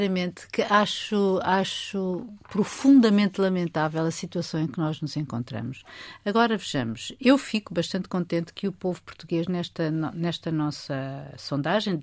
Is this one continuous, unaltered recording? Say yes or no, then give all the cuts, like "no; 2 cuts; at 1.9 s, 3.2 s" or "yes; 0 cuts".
yes; 0 cuts